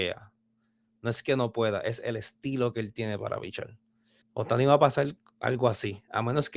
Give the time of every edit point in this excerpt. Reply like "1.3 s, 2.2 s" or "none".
4.2 s